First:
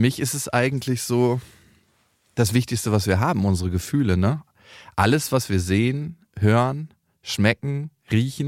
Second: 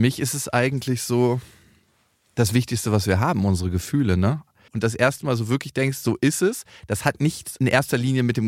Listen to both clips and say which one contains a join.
second; 1 cut; at 4.7 s

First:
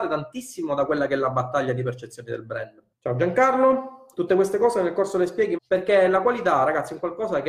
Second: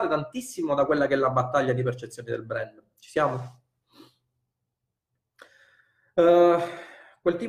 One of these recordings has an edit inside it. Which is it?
first; 2 cuts; at 2.9 s, 5.6 s

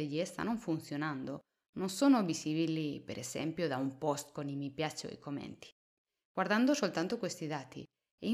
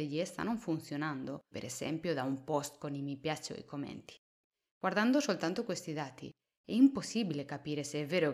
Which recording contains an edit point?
second; 1 cut; at 1.5 s

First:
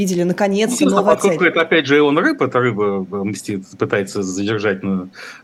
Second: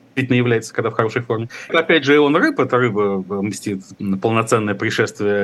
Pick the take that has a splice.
second; 2 cuts; at 1.7 s, 3.9 s

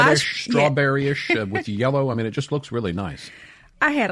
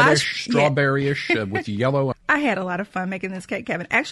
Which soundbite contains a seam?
second; 1 cut; at 2.1 s

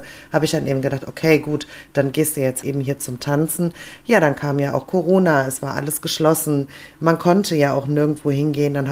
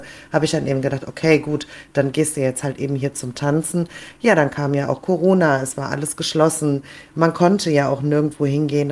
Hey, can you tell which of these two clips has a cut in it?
first; 1 cut; at 2.6 s

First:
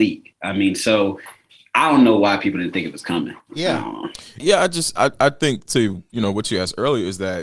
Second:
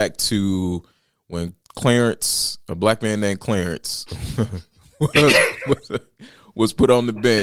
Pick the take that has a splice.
first; 2 cuts; at 4.4 s, 5.6 s

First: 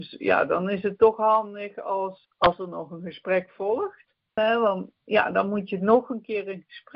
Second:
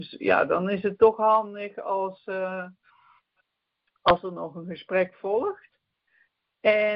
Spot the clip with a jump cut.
first; 2 cuts; at 2.2 s, 4.4 s

